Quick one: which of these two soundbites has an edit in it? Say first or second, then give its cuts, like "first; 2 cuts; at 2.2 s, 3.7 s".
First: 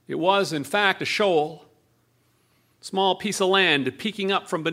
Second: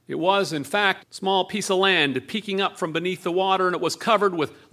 second; 1 cut; at 1.0 s